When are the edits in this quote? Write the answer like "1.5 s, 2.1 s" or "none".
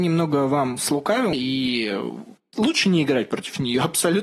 1.3 s